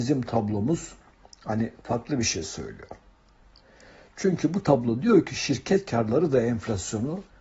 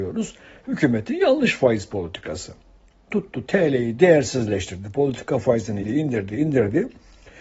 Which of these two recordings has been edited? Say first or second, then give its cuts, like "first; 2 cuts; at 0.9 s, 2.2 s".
second; 1 cut; at 5.8 s